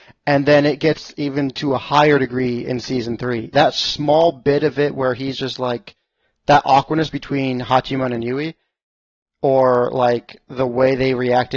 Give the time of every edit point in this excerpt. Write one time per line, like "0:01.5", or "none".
0:03.5